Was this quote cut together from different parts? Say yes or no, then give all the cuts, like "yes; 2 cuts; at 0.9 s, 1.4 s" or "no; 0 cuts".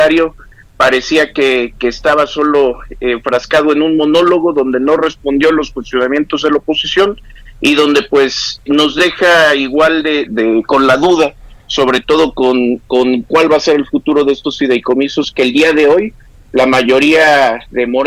yes; 2 cuts; at 8.7 s, 10.3 s